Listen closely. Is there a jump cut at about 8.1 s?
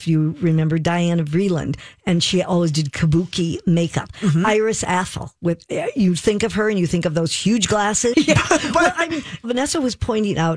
yes; 2 cuts; at 8.1 s, 9.4 s

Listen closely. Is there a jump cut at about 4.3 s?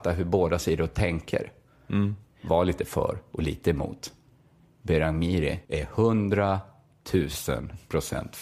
no; 1 cut; at 5.6 s

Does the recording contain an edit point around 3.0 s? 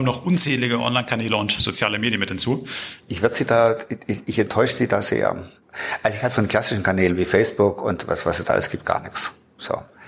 yes; 1 cut; at 3.0 s

